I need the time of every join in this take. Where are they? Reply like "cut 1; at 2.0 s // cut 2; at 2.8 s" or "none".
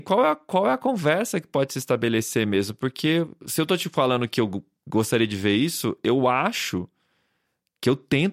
none